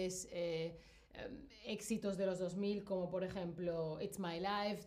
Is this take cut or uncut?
uncut